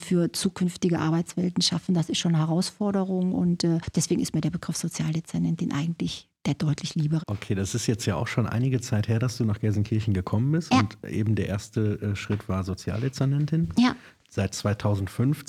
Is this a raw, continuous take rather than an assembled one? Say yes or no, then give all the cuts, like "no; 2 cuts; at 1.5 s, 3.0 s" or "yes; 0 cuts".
no; 1 cut; at 7.2 s